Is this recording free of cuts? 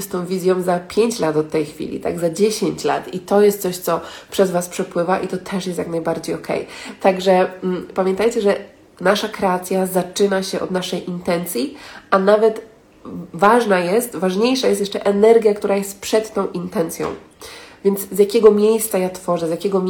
yes; 0 cuts

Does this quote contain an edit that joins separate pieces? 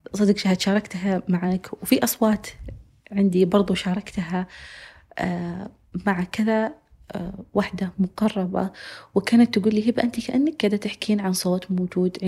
no; 0 cuts

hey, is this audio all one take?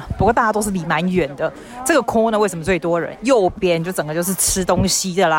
no; 1 cut; at 3.1 s

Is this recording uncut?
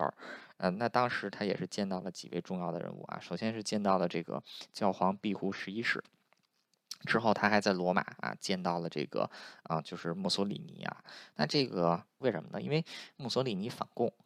no; 1 cut; at 12.2 s

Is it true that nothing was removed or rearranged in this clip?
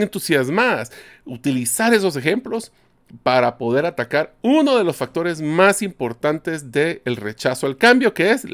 yes; 0 cuts

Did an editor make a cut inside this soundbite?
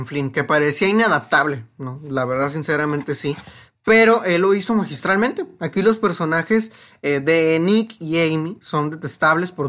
no; 0 cuts

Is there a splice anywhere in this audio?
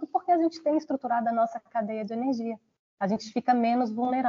no; 0 cuts

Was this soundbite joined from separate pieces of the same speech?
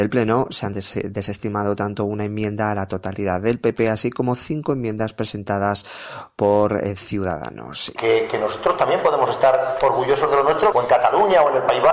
yes; 2 cuts; at 8.0 s, 10.7 s

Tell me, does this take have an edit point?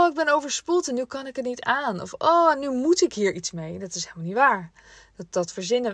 no; 0 cuts

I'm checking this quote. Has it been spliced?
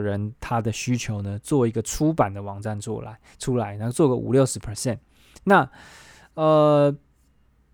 no; 0 cuts

